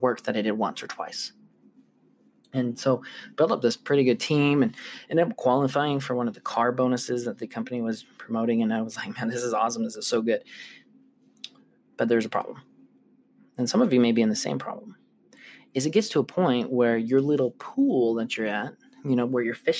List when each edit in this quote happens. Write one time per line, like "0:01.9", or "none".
none